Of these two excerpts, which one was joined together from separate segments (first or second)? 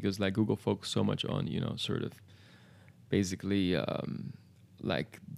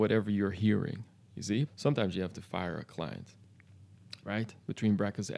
second